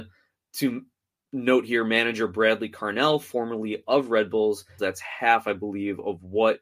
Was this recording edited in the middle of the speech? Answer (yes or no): yes